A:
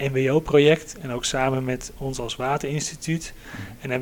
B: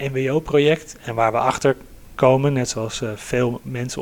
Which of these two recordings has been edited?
B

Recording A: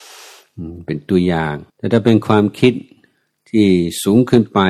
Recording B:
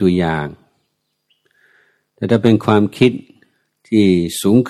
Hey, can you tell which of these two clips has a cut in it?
A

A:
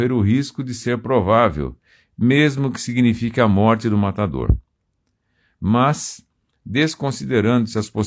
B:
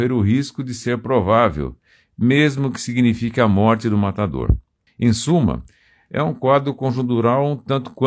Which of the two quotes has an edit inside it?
B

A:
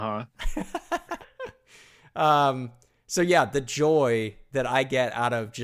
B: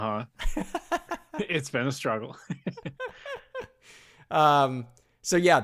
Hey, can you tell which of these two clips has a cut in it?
A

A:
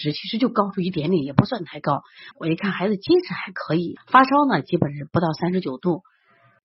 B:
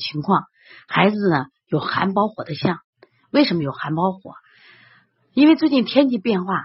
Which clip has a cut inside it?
A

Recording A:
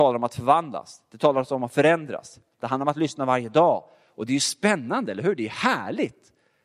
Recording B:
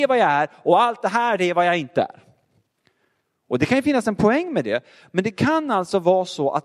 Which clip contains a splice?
A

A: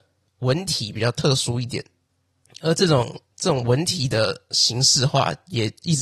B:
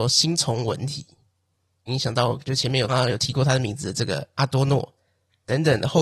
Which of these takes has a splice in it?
B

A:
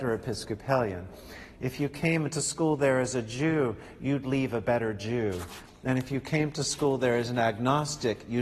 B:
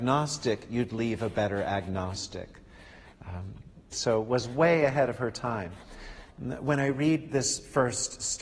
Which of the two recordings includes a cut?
B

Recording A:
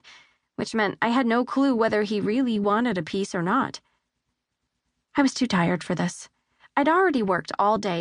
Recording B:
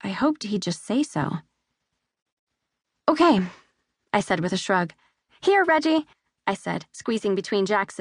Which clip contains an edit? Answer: B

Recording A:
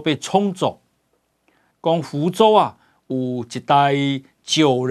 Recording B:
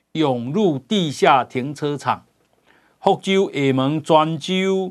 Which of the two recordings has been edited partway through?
A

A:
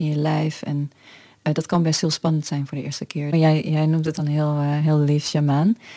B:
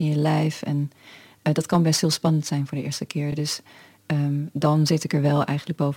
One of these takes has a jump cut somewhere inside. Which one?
A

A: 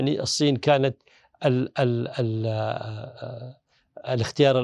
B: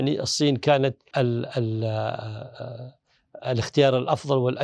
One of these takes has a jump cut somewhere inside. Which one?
B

